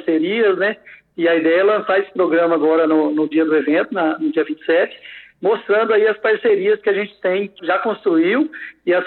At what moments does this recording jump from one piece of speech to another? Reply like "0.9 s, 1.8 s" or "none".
7.6 s